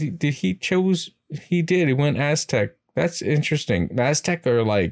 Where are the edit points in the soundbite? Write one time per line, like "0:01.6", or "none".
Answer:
none